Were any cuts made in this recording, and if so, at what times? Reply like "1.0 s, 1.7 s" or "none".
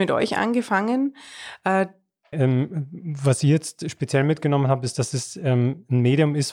2.3 s